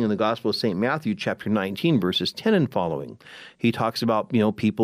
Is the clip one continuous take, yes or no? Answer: yes